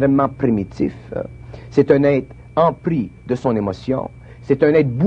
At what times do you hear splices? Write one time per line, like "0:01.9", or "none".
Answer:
none